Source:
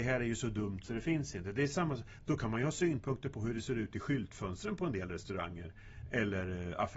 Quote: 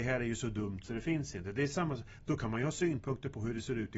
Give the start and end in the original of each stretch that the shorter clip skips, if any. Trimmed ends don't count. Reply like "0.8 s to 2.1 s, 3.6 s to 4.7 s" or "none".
none